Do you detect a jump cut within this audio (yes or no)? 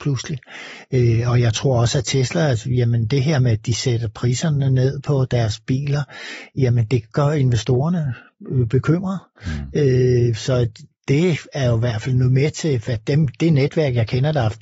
no